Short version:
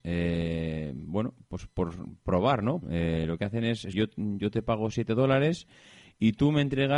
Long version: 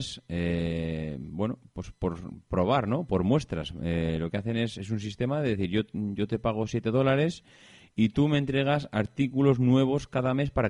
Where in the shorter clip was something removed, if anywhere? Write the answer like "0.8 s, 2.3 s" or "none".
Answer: 2.8 s, 3.9 s